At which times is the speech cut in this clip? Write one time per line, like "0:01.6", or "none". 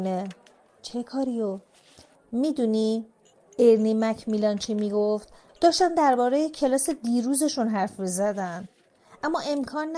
0:02.1
0:05.5